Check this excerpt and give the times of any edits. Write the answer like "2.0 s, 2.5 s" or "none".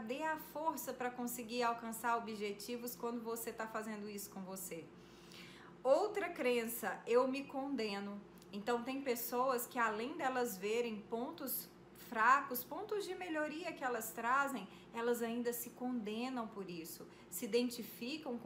none